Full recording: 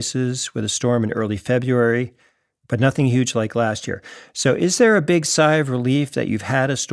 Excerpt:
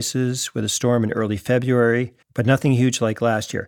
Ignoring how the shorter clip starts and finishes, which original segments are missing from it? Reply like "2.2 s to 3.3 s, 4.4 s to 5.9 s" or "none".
2.2 s to 2.6 s